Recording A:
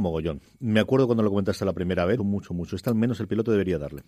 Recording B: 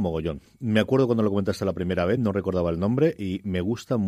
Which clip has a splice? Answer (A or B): A